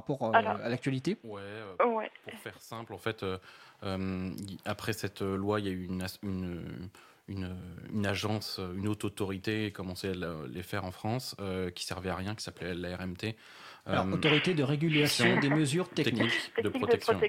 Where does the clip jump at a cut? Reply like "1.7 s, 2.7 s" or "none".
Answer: none